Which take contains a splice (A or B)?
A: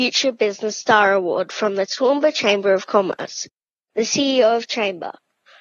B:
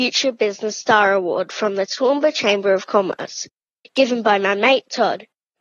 A